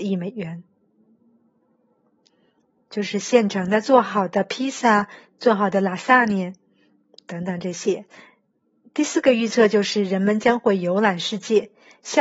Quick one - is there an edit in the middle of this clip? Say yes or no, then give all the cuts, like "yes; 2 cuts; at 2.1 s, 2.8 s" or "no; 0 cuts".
no; 0 cuts